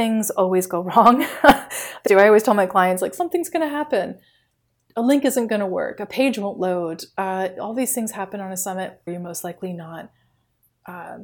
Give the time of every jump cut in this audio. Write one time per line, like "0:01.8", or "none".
0:02.1
0:09.1